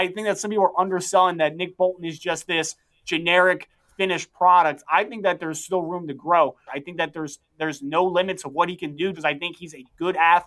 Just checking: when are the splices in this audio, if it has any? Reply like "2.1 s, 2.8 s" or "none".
6.7 s, 9.1 s